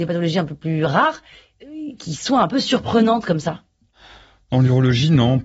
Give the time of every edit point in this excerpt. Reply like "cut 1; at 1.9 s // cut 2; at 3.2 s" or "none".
none